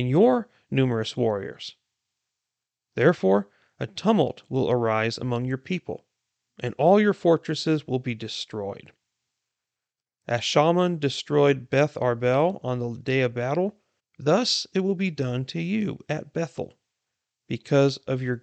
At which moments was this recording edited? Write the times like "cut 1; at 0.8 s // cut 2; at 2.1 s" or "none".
cut 1; at 14.0 s